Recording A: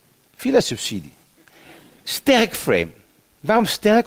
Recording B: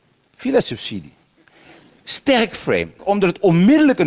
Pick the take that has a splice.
B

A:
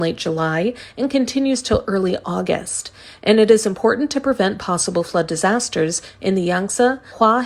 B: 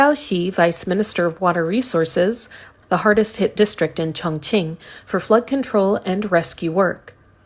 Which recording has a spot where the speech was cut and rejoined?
B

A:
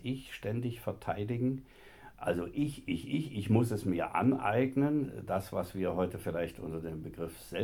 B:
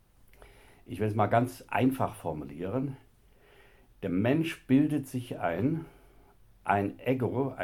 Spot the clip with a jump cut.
A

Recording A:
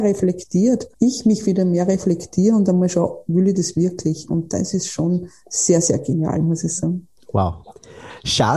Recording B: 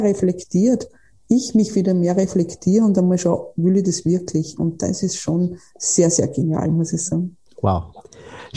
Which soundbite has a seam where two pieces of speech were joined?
A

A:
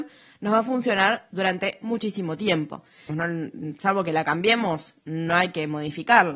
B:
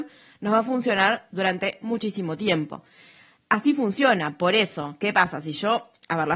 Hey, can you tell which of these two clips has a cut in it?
A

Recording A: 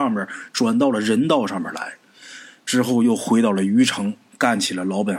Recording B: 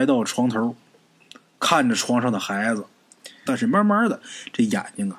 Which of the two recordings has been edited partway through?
B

